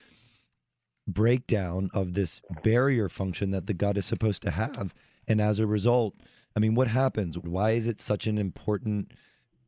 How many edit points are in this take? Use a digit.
1